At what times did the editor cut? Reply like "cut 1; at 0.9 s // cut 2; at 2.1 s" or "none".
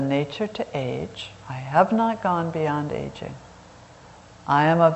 none

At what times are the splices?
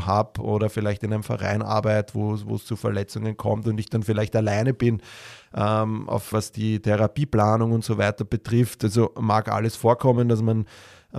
cut 1; at 6.3 s

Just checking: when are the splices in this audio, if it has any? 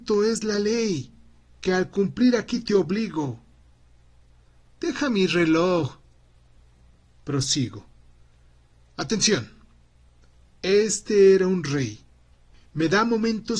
none

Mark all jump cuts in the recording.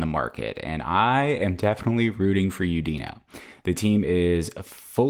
none

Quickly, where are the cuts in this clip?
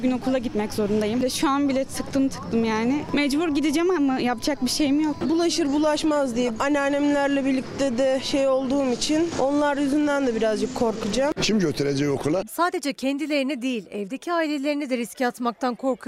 cut 1; at 5.2 s // cut 2; at 11.4 s // cut 3; at 12.4 s

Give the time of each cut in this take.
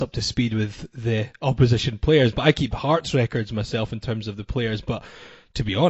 none

